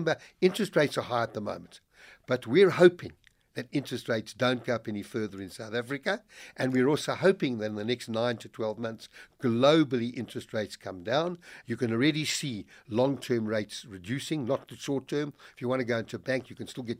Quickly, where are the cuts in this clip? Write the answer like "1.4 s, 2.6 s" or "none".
11.6 s